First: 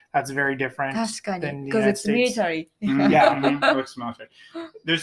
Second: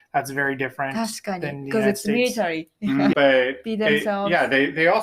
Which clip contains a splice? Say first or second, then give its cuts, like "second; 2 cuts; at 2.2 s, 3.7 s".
second; 1 cut; at 3.1 s